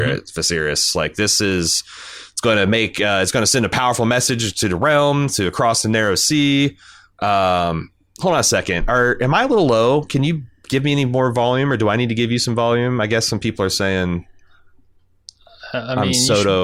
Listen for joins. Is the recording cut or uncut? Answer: uncut